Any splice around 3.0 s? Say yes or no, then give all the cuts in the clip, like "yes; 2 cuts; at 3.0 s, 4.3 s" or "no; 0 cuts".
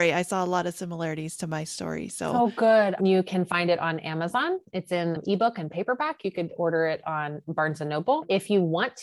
yes; 1 cut; at 3.0 s